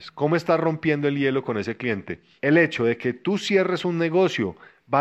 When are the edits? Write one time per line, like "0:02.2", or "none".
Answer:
0:02.4